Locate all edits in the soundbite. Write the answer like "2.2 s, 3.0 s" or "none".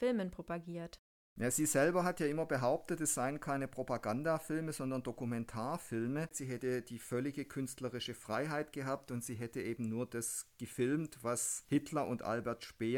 6.3 s